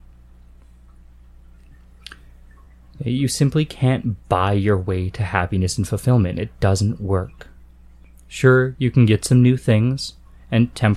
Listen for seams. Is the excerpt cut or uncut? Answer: uncut